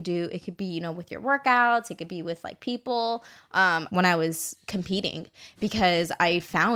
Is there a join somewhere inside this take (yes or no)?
yes